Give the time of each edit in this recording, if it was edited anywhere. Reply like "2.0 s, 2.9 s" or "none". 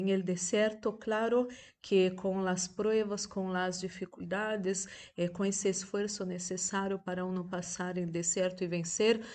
none